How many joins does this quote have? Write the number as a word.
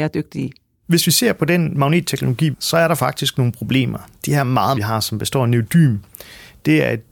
two